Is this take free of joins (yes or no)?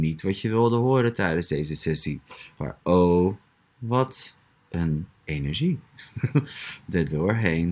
yes